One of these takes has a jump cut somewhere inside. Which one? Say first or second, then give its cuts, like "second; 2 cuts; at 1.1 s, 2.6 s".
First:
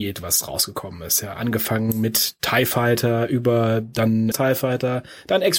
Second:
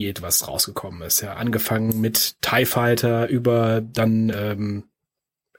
first; 1 cut; at 4.3 s